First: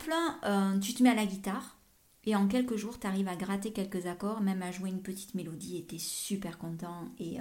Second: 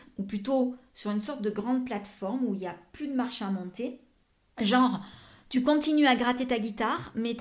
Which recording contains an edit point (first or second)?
second